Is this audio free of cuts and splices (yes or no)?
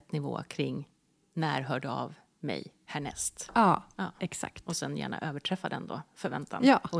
yes